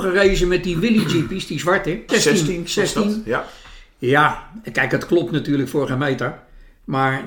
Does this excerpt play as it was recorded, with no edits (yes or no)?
no